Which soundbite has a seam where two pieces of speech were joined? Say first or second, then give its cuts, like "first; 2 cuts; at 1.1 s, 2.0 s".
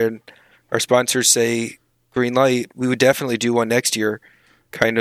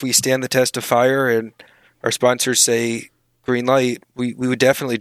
first; 1 cut; at 2.7 s